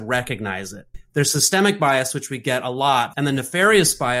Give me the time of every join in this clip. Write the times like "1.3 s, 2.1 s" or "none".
0.9 s, 3.1 s